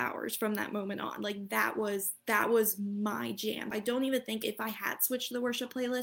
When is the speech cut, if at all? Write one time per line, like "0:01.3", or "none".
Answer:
0:03.7